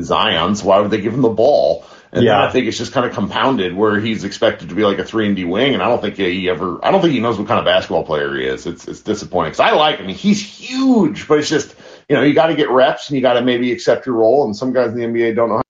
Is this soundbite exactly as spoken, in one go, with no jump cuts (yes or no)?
yes